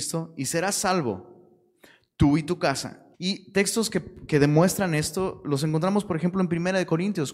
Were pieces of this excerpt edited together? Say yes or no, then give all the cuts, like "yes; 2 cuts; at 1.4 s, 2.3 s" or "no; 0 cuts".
yes; 1 cut; at 3.1 s